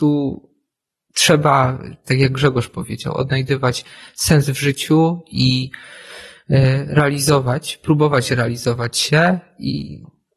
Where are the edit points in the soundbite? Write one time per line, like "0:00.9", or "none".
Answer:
none